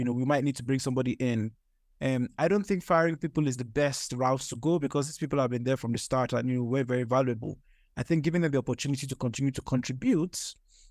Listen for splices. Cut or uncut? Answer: uncut